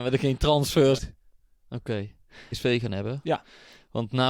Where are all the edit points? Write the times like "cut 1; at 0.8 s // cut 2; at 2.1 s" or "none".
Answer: cut 1; at 1.0 s // cut 2; at 2.5 s